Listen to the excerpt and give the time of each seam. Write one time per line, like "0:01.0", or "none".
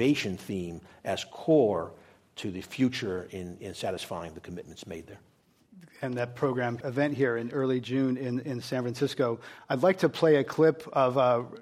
0:06.8